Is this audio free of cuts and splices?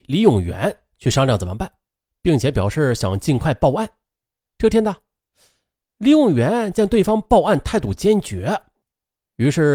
no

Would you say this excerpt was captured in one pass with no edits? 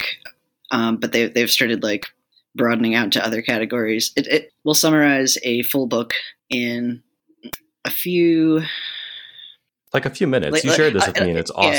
no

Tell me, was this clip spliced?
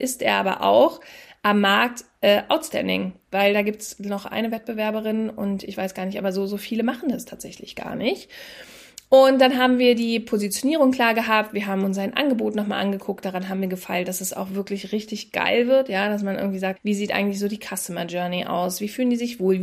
yes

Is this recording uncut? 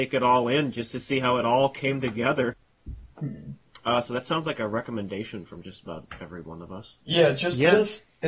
no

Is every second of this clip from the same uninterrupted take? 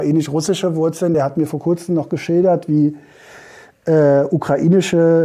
yes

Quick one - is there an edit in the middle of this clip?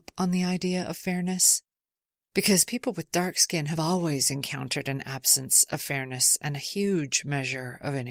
no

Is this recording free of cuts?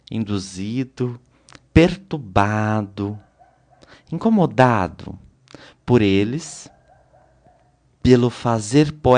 no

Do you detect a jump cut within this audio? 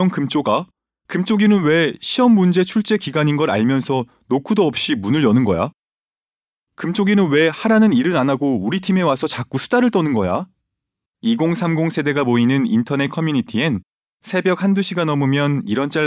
yes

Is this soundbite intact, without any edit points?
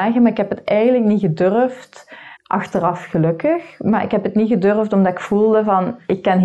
no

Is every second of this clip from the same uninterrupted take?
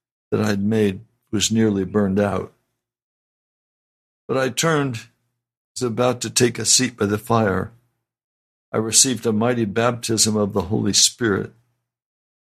yes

